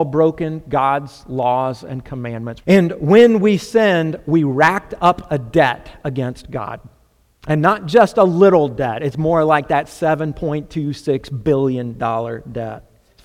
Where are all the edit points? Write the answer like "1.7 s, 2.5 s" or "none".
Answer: 2.6 s

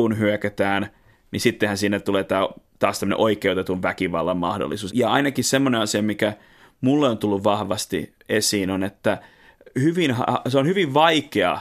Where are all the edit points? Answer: 4.9 s

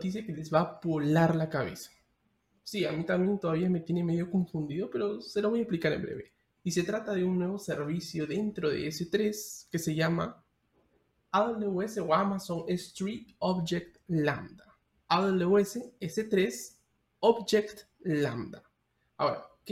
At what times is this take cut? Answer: 15.0 s

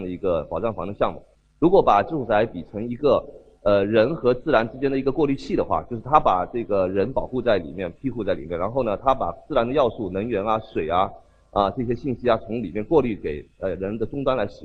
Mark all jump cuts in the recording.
none

